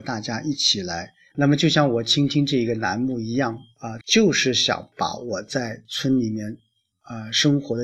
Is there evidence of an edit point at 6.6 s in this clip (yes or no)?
no